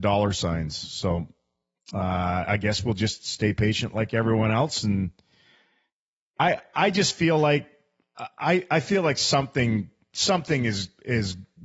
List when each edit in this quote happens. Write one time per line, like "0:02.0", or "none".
none